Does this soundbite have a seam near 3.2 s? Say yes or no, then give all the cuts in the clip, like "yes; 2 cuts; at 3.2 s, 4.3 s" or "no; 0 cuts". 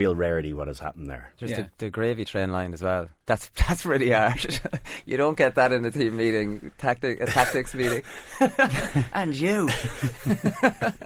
yes; 1 cut; at 3.2 s